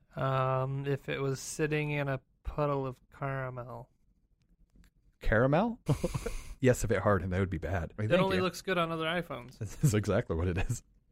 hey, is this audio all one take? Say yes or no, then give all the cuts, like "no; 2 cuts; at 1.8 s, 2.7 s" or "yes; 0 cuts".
no; 2 cuts; at 5.9 s, 8.0 s